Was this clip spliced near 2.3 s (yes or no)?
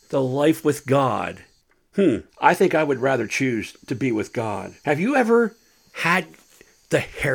yes